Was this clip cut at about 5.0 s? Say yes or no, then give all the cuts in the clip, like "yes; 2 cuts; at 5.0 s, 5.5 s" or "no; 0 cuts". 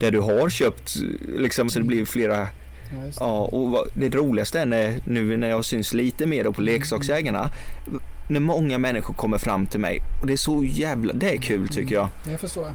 no; 1 cut; at 1.7 s